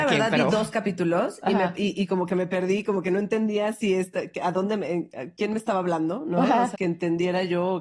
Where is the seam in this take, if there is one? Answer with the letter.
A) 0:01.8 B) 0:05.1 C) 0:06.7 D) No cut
C